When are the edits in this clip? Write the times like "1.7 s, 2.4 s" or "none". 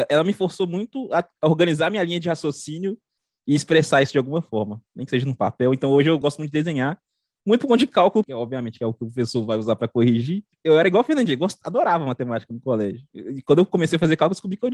6.2 s, 8.2 s, 10.5 s